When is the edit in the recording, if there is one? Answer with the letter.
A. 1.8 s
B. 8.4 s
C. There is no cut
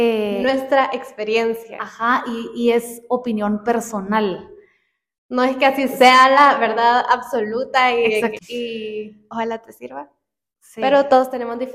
B